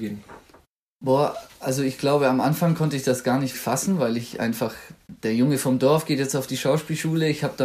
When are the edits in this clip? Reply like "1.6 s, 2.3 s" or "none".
3.5 s

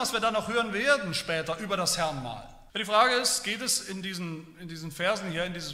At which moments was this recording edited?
2.7 s

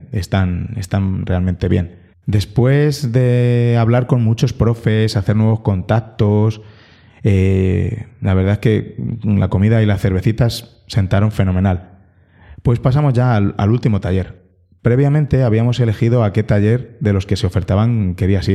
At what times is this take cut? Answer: none

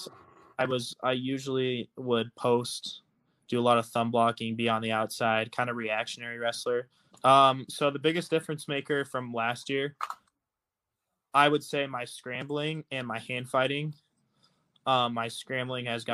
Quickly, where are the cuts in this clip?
7.1 s

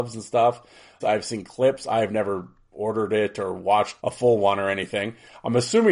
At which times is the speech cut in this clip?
1.0 s, 4.0 s

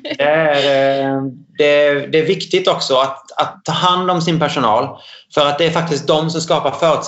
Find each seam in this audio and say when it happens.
none

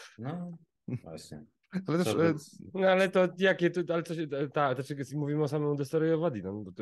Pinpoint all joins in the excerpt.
none

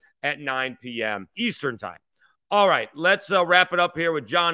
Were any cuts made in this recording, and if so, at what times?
1.3 s

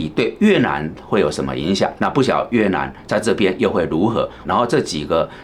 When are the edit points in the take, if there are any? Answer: 2.0 s, 4.4 s

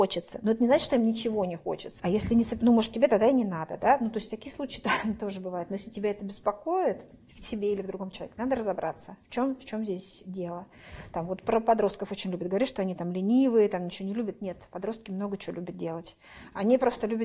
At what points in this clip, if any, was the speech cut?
2.0 s

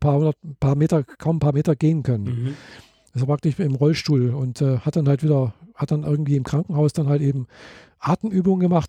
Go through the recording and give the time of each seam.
none

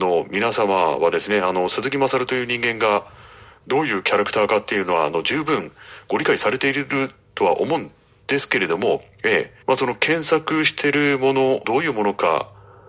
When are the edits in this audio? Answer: 9.6 s, 11.6 s

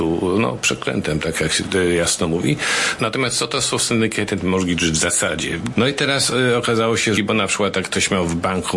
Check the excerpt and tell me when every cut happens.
3.0 s, 5.7 s, 7.2 s

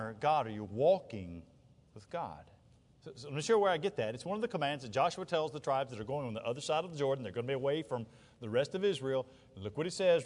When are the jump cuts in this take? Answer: 2.9 s

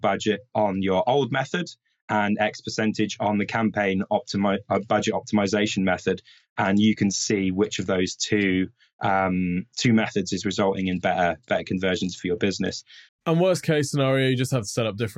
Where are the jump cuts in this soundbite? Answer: 13.1 s

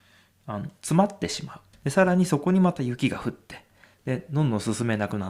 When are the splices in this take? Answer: 1.7 s

